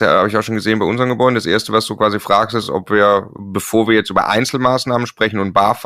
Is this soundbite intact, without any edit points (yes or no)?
yes